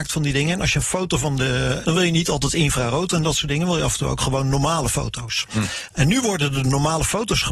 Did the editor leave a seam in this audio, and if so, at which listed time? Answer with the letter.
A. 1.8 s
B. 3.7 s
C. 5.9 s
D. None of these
A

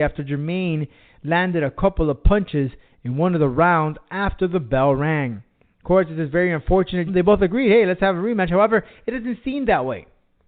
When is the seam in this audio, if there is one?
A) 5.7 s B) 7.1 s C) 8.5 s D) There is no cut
B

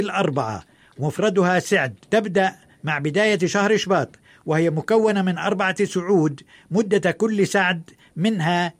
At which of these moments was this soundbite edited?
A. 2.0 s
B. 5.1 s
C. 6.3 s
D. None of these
A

